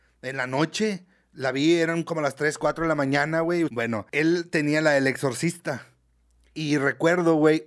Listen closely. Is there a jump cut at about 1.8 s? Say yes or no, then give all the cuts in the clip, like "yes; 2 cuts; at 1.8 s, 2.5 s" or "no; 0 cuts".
no; 1 cut; at 3.7 s